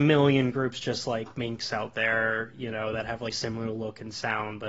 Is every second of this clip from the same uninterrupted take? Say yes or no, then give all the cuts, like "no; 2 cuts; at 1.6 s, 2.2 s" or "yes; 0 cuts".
no; 1 cut; at 3.3 s